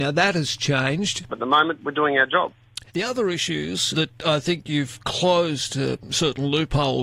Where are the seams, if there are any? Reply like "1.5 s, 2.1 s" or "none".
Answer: 1.3 s, 2.9 s, 3.9 s